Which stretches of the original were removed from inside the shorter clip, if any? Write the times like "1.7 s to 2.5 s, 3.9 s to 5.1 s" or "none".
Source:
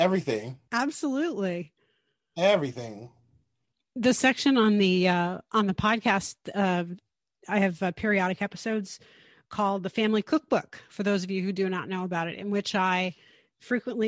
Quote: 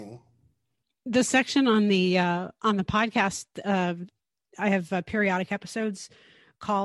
none

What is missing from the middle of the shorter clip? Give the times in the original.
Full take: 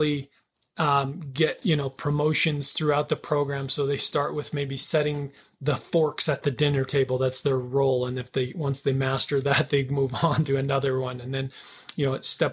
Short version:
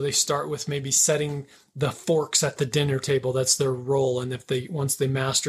none

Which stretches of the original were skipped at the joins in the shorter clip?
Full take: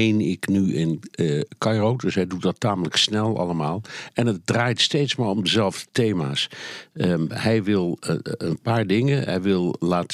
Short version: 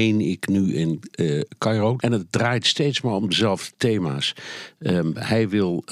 2.0 s to 4.1 s

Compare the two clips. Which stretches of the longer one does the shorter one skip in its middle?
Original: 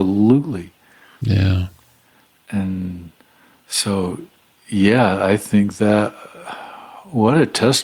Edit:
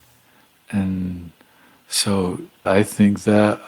4.4 s to 5.2 s

